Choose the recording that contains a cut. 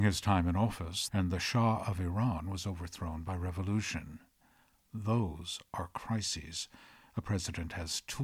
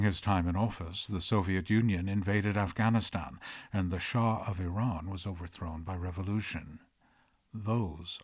first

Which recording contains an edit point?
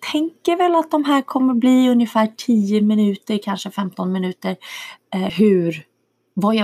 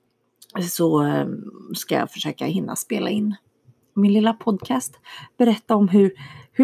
first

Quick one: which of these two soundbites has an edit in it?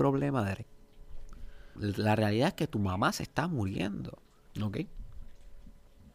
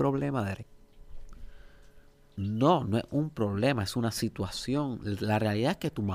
first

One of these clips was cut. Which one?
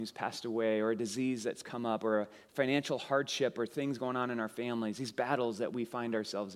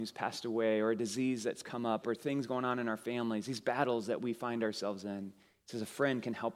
second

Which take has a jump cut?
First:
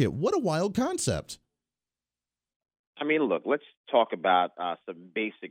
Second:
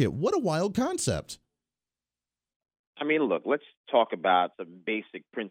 second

